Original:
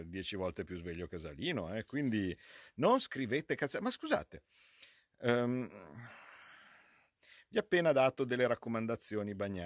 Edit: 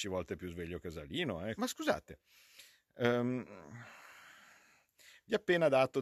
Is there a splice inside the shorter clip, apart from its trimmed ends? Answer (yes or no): yes